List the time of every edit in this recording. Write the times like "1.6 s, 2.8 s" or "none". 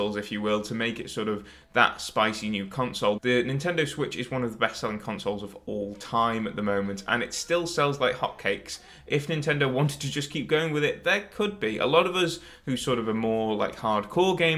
3.2 s

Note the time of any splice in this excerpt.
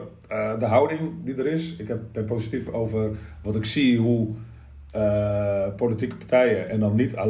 none

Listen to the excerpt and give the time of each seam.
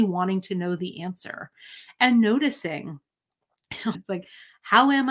3.9 s

